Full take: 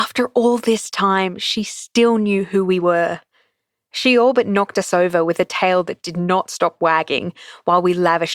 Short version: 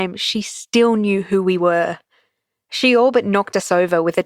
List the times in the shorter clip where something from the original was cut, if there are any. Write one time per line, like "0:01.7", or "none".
none